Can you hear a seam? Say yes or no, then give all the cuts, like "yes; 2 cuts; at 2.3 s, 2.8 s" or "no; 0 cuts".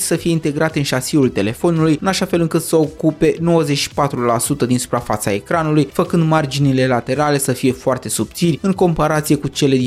no; 0 cuts